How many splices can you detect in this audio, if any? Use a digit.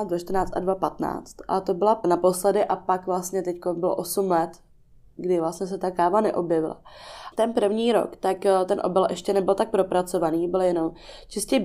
2